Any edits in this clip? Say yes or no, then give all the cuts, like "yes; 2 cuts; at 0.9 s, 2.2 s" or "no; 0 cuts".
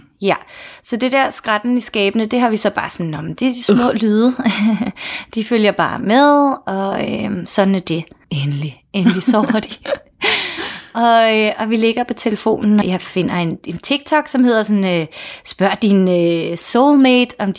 yes; 2 cuts; at 8.2 s, 12.8 s